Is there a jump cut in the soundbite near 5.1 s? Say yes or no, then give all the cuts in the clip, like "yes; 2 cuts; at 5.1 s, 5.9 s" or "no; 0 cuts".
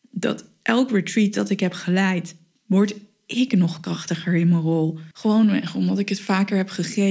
yes; 1 cut; at 5.1 s